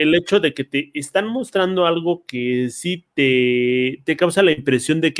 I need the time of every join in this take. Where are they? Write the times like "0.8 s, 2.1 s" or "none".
none